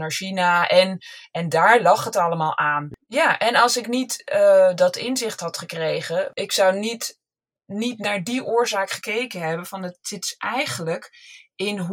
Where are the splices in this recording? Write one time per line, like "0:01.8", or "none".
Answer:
none